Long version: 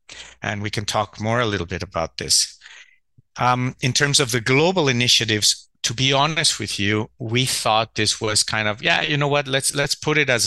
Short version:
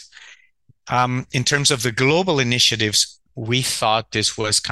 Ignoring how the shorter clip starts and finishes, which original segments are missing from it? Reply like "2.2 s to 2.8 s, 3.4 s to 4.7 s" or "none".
5.8 s to 7.1 s